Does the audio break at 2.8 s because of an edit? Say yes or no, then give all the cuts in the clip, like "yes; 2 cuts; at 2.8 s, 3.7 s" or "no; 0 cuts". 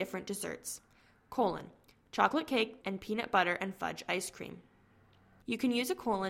yes; 1 cut; at 2.8 s